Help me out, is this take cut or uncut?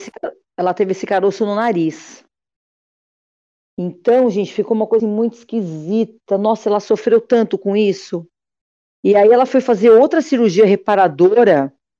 cut